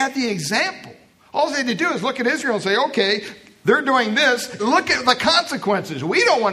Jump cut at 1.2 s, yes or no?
no